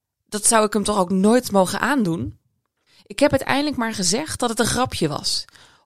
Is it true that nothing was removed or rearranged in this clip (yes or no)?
yes